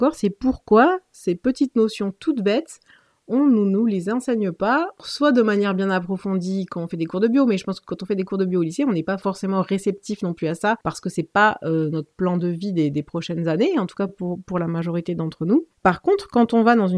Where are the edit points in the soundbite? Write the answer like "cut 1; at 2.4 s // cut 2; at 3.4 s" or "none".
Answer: none